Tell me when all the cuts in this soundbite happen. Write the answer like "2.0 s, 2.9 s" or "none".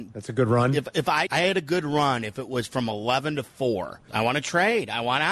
1.3 s, 4.1 s